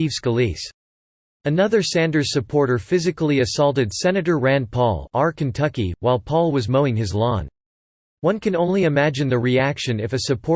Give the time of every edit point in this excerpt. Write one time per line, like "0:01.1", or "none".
none

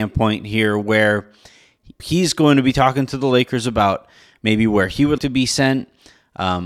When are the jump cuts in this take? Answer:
0:02.0
0:05.2

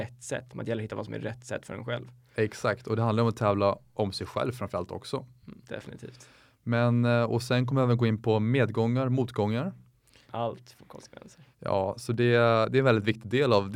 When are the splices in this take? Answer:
0:05.6
0:10.3
0:11.5

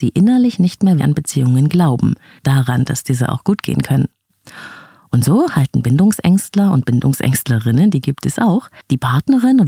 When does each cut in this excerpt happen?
0:01.0

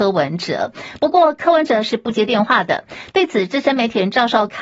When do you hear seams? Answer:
none

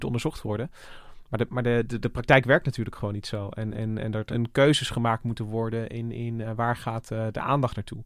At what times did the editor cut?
0:04.3

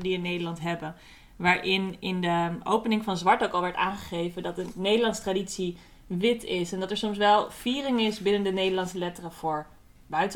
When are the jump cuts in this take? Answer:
none

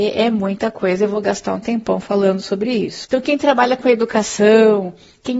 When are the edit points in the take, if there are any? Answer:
0:03.1

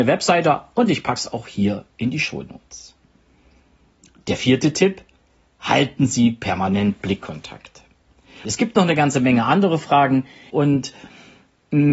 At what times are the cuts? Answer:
0:08.4
0:10.5

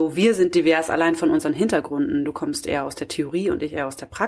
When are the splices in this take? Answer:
none

